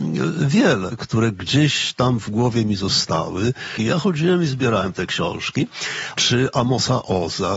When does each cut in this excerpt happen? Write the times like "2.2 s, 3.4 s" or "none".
1.0 s, 3.8 s, 6.2 s

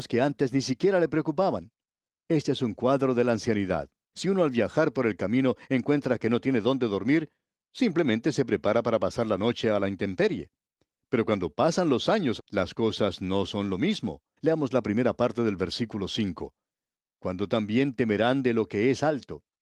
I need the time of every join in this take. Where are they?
4.1 s, 12.4 s, 14.4 s

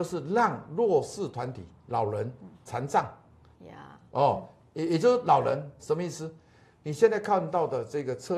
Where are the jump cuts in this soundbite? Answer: 3.5 s, 5.8 s

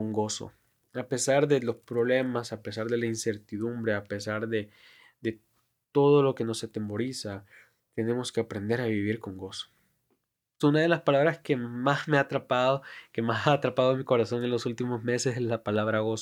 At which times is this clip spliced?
10.6 s

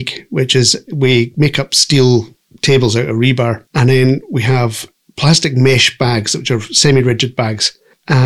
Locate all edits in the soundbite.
3.7 s

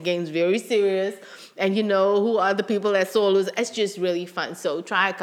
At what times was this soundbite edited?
none

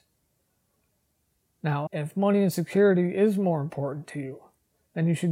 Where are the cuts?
1.9 s

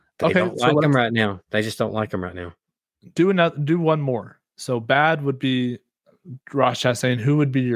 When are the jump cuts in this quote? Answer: none

